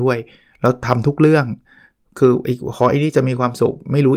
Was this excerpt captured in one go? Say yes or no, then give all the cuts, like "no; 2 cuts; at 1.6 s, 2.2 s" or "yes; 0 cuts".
yes; 0 cuts